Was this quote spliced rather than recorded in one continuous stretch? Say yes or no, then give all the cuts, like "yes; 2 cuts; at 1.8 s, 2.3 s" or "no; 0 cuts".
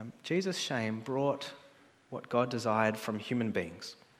no; 0 cuts